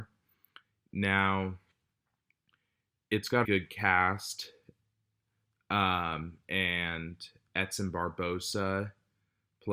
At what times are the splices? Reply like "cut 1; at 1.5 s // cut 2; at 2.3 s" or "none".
cut 1; at 3.4 s